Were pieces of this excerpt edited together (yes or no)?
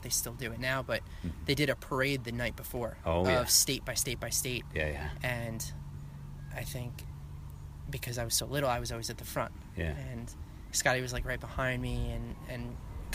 no